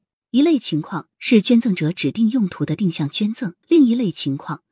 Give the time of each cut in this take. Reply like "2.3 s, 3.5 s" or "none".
3.6 s

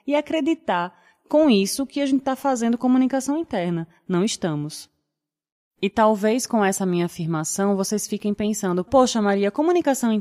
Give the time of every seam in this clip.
8.9 s

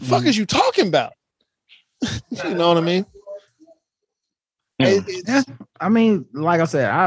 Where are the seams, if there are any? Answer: none

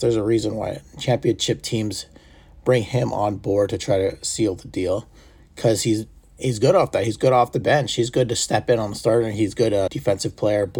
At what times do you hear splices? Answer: 9.9 s

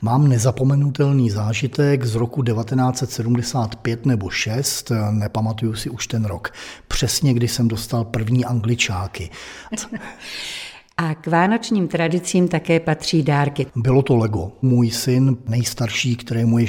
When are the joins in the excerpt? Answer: 9.7 s, 13.7 s

